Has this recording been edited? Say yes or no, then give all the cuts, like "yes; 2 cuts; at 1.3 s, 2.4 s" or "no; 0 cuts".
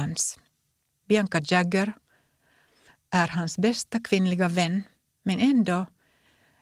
yes; 1 cut; at 0.9 s